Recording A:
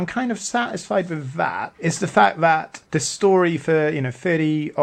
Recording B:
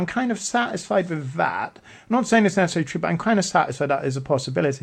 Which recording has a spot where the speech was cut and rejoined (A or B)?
A